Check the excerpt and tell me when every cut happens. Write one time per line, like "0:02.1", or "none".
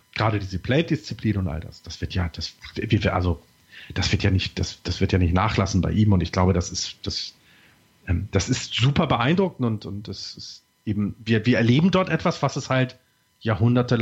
none